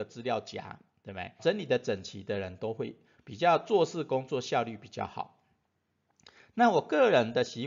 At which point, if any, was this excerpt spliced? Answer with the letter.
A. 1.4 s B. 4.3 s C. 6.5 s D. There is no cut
A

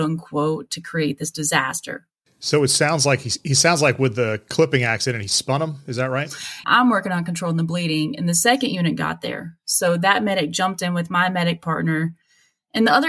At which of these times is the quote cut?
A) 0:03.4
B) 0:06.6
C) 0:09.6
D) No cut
B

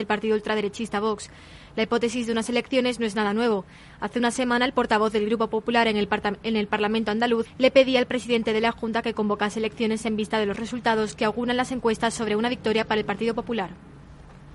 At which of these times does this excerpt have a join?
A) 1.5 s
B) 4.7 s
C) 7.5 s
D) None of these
C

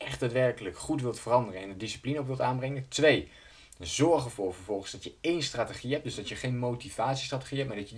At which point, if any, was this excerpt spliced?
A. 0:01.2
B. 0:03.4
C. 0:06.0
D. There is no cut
D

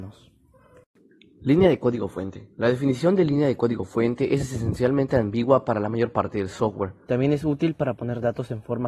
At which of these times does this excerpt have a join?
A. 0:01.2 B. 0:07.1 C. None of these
B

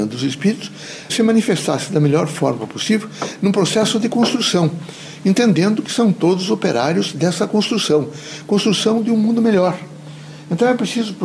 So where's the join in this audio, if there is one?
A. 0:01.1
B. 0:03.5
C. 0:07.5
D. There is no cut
A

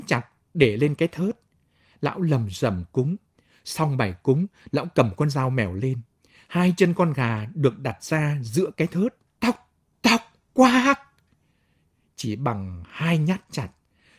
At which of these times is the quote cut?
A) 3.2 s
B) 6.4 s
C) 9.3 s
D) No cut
C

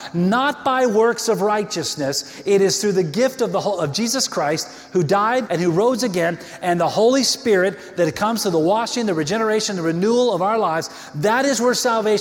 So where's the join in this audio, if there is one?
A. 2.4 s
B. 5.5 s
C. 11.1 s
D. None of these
B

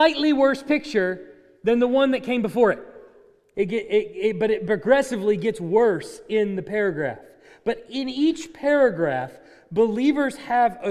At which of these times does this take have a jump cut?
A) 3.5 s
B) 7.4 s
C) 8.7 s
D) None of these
A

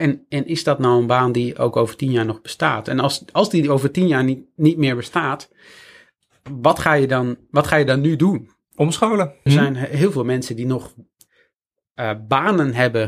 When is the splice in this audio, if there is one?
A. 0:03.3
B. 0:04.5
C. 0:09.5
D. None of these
C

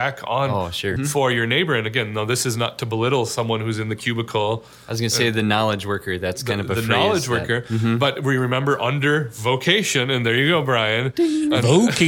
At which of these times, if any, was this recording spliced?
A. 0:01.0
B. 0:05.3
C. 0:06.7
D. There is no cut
A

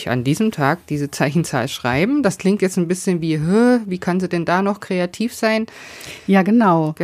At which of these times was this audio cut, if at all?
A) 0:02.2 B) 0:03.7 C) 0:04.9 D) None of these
D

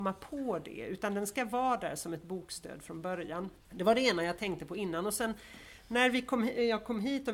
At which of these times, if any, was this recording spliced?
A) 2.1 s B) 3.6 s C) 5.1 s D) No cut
B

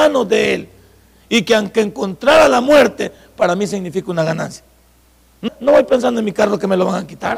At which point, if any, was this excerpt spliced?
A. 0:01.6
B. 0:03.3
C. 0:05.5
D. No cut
C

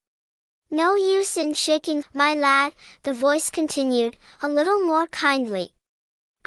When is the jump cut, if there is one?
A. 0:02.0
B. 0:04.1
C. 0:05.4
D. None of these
A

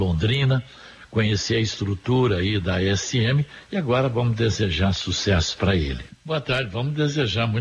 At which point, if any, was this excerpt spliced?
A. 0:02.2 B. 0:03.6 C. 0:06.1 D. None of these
C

